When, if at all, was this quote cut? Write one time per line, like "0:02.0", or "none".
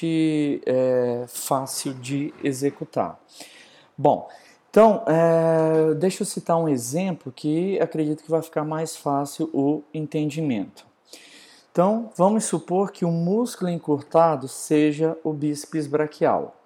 none

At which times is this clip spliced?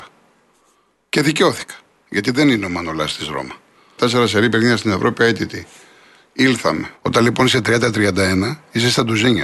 0:04.0
0:06.9

